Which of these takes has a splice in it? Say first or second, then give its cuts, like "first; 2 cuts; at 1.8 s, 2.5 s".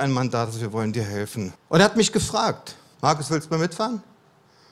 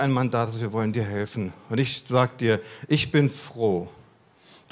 first; 2 cuts; at 1.6 s, 2.9 s